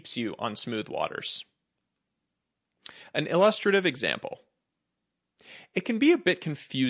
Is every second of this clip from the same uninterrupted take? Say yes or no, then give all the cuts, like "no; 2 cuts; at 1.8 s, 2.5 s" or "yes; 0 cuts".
yes; 0 cuts